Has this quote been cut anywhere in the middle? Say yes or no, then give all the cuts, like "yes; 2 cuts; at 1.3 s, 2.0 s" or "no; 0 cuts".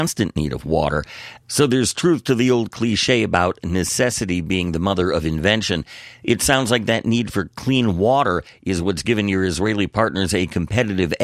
yes; 1 cut; at 1.4 s